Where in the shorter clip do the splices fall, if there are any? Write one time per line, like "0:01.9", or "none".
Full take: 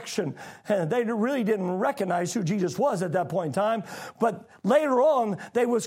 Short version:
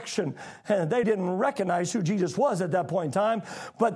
0:01.0